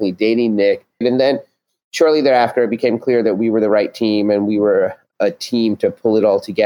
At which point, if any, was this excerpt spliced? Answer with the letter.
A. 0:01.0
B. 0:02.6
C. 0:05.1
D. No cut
A